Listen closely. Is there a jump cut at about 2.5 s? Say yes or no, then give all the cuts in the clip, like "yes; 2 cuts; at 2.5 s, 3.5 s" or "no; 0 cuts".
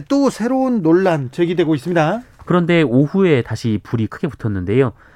yes; 1 cut; at 2.5 s